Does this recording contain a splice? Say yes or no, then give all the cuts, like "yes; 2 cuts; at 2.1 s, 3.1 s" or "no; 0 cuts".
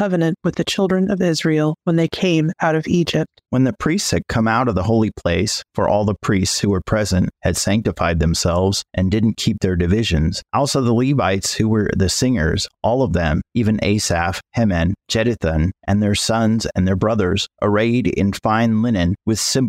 no; 0 cuts